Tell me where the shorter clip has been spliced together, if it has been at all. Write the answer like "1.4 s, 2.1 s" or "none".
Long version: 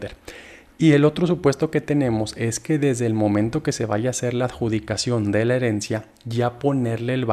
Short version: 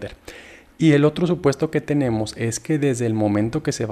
none